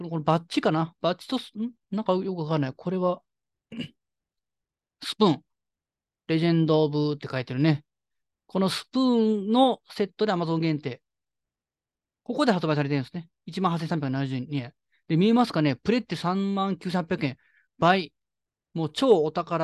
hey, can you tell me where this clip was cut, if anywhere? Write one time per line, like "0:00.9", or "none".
none

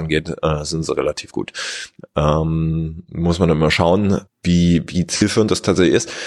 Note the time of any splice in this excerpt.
0:02.0
0:04.3

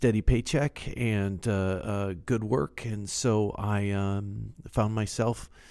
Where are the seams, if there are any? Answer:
none

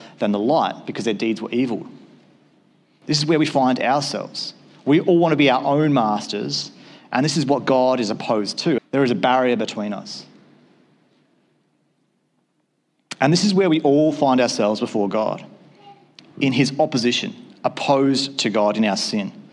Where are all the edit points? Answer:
0:08.8

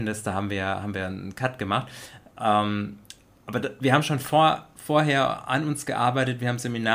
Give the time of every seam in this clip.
none

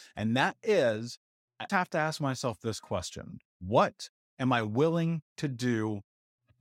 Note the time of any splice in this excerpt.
0:01.7
0:03.5

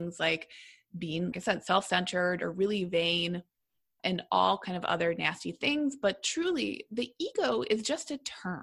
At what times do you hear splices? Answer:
0:01.3
0:04.0

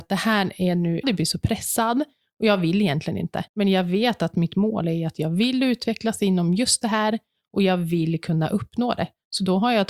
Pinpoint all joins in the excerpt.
0:01.0
0:03.5

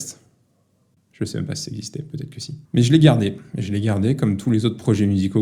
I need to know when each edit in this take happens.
0:01.0
0:02.7

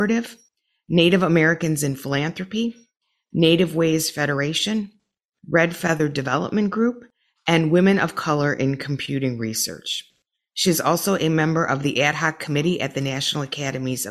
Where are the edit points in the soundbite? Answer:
none

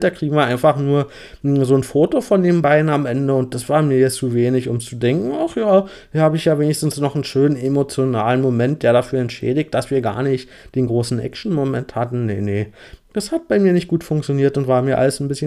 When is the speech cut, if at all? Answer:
none

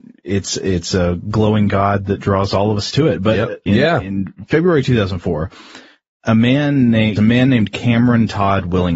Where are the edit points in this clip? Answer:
0:03.7
0:07.2

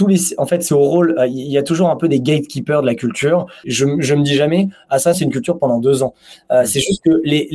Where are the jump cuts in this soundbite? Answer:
0:03.6
0:05.1

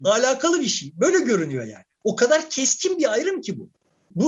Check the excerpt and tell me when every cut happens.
none

